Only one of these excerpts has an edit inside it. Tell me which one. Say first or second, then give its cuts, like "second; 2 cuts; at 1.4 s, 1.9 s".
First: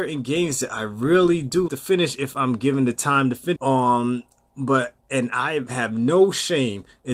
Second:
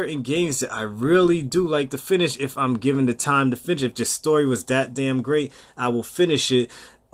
first; 2 cuts; at 1.7 s, 3.6 s